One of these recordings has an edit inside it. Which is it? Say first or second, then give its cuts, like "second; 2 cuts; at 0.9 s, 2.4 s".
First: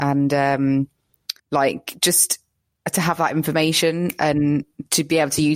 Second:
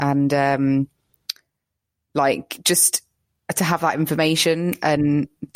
first; 1 cut; at 1.4 s